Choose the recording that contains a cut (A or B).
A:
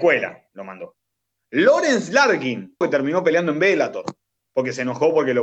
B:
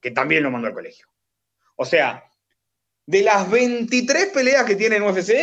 A